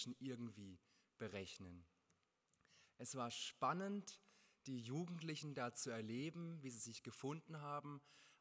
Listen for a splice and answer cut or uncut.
uncut